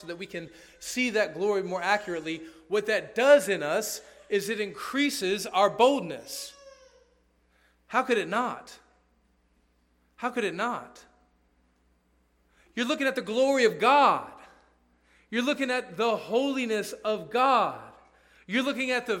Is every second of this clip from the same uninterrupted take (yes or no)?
yes